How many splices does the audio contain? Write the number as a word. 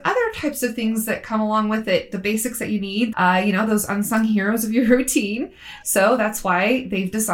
two